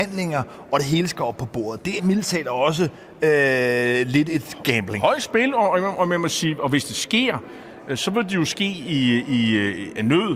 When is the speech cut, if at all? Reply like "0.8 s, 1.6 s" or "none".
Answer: 2.0 s